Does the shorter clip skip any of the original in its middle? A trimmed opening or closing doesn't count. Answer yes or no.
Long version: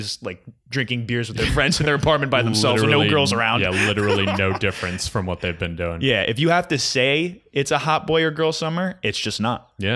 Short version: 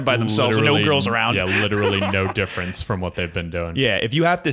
no